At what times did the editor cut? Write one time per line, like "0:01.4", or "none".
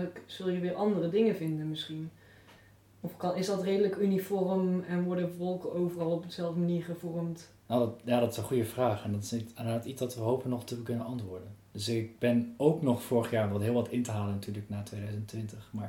none